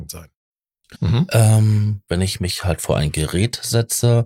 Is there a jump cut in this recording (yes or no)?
yes